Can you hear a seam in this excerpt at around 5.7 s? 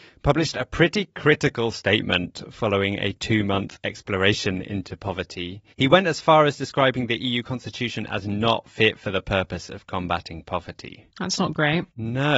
yes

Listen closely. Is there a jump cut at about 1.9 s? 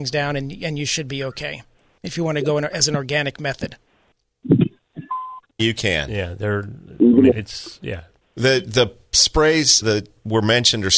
no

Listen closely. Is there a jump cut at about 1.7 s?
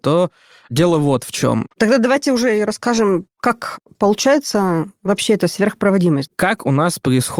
yes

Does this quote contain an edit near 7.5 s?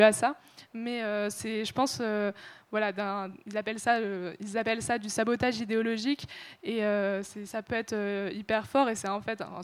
yes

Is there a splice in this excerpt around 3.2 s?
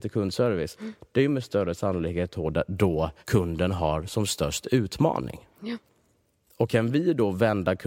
yes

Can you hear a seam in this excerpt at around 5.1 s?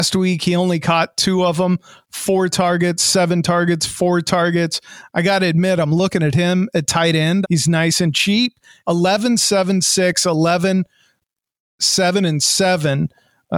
no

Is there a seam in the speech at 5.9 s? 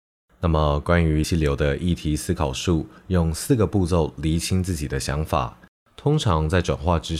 yes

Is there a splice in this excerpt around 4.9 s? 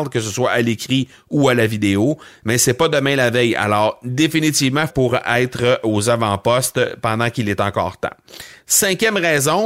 yes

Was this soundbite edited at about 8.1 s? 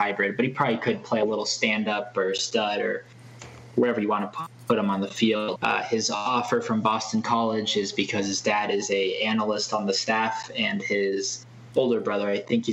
no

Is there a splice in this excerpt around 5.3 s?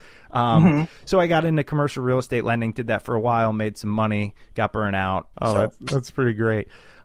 yes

